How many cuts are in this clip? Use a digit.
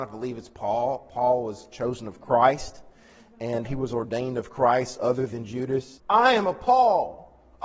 2